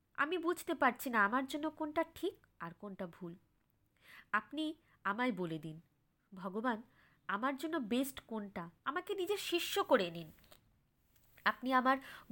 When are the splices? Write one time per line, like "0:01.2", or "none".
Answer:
0:08.8